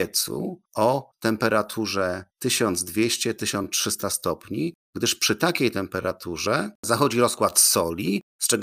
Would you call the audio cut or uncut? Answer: uncut